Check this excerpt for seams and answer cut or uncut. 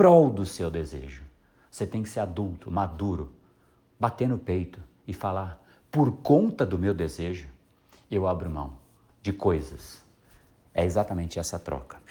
uncut